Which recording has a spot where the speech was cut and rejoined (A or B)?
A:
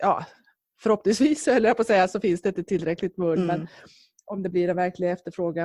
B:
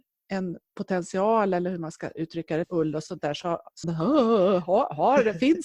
B